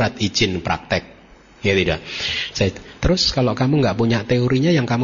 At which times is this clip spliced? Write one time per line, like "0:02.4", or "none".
0:02.5